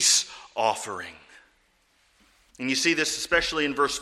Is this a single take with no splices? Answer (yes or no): no